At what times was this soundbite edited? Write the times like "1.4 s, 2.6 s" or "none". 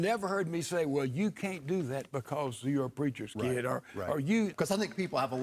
4.5 s